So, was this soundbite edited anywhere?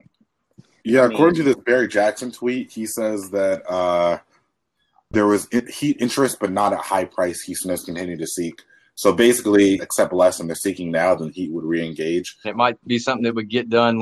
yes; 2 cuts; at 9.8 s, 12.4 s

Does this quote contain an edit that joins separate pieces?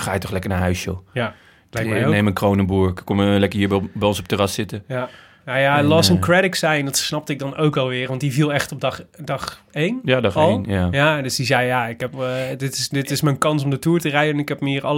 no; 0 cuts

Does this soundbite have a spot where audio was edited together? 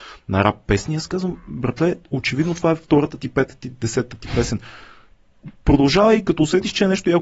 no; 0 cuts

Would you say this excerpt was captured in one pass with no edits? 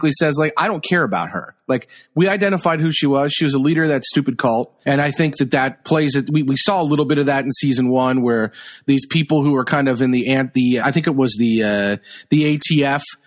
no; 2 cuts; at 4.8 s, 10.8 s

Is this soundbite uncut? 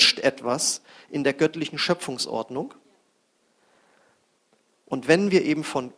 yes; 0 cuts

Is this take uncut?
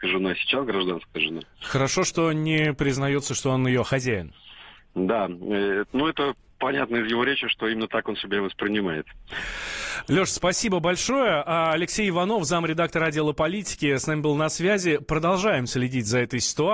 yes; 0 cuts

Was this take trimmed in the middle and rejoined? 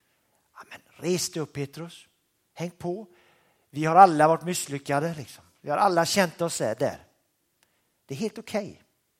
no; 0 cuts

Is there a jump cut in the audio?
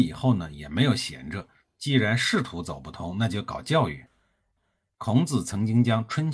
yes; 1 cut; at 4.9 s

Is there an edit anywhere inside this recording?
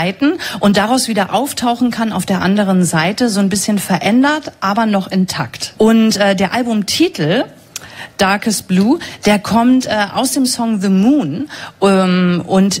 yes; 1 cut; at 5.7 s

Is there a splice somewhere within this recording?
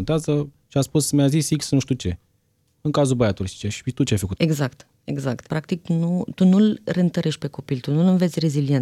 yes; 2 cuts; at 4.4 s, 5.5 s

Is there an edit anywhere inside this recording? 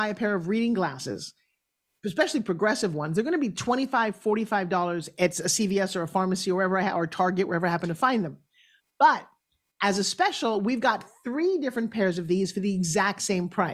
no; 0 cuts

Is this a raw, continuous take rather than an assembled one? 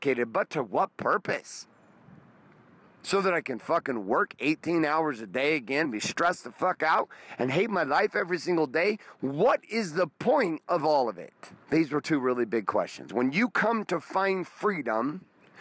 no; 3 cuts; at 5.8 s, 11.6 s, 13.1 s

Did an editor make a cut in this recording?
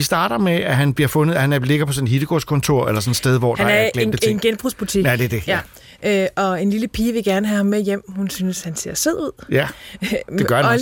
no; 0 cuts

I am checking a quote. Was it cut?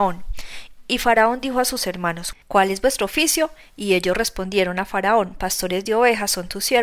yes; 1 cut; at 2.4 s

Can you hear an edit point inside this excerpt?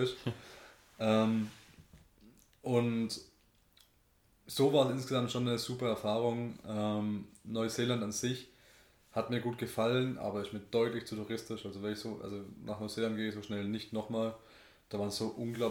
no; 0 cuts

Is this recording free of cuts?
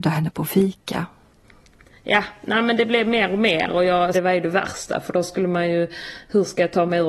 no; 1 cut; at 4.1 s

